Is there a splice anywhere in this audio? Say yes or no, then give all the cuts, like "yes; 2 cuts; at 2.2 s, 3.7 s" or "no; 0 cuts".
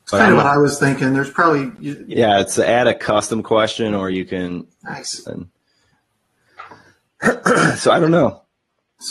yes; 2 cuts; at 2.1 s, 5.3 s